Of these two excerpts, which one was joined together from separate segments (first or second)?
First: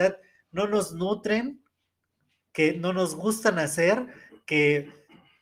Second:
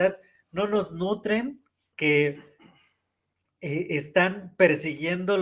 second